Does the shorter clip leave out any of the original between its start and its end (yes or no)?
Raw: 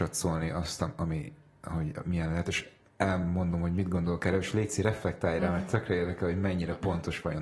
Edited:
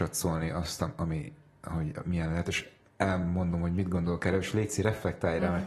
no